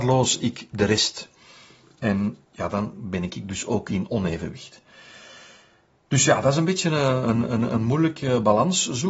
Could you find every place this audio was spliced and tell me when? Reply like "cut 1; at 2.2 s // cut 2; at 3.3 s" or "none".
none

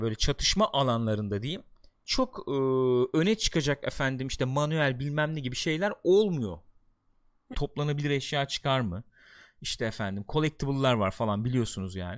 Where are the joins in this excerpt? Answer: cut 1; at 7.5 s

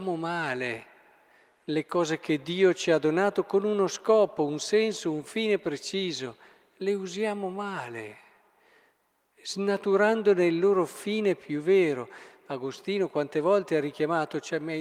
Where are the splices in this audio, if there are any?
none

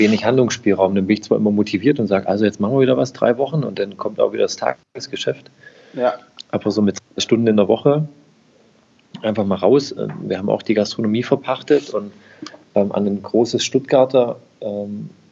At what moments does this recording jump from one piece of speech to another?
none

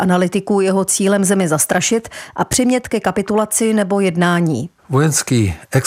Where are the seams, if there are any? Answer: cut 1; at 4.8 s

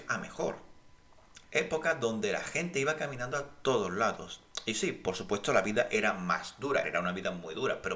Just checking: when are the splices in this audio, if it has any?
cut 1; at 1.4 s // cut 2; at 6.8 s

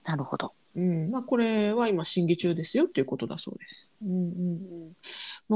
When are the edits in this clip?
cut 1; at 4.0 s

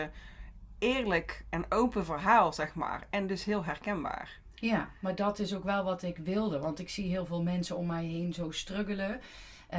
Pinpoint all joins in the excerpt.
none

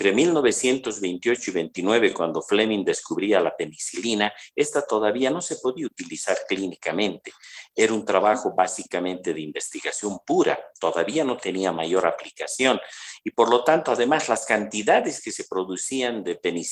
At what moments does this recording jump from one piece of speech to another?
none

